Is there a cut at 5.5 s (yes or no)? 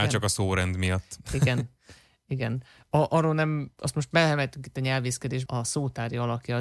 yes